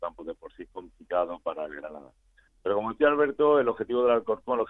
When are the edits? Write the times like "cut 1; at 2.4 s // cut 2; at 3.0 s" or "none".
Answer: none